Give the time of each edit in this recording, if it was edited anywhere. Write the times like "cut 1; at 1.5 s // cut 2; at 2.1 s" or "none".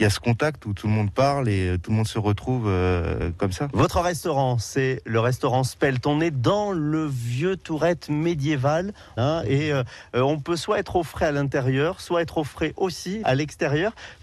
cut 1; at 9.2 s // cut 2; at 13.2 s